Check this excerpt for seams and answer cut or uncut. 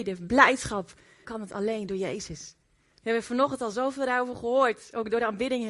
cut